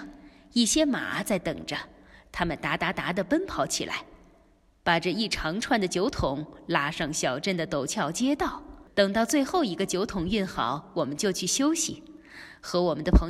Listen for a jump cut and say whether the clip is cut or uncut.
uncut